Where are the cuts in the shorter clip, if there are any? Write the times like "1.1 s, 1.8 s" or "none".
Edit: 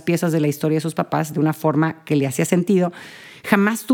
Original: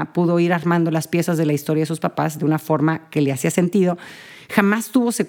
none